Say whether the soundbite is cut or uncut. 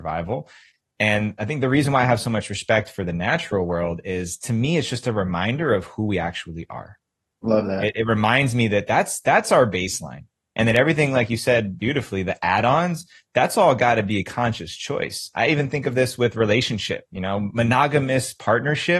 uncut